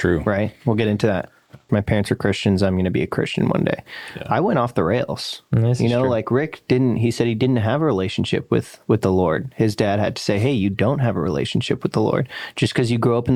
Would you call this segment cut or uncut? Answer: cut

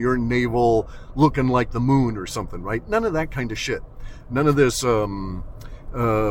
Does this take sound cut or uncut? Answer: uncut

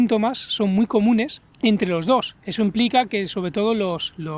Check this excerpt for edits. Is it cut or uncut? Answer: cut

